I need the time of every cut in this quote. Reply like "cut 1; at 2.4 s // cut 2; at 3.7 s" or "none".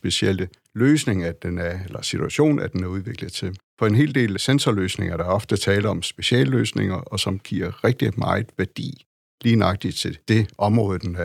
cut 1; at 3.7 s